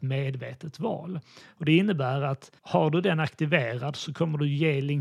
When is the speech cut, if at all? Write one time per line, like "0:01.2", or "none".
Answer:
0:01.5
0:02.6